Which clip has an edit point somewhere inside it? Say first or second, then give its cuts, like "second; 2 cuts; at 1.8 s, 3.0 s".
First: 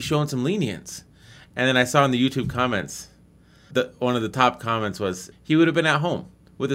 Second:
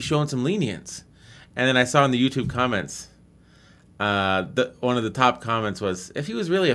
first; 2 cuts; at 3.7 s, 5.3 s